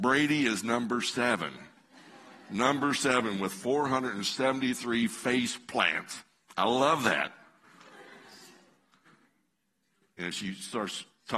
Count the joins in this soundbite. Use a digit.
0